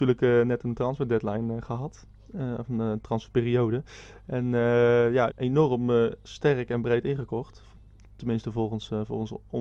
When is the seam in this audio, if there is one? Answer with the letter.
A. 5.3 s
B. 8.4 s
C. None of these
A